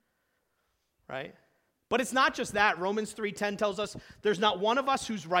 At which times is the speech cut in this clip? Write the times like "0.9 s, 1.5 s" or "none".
1.8 s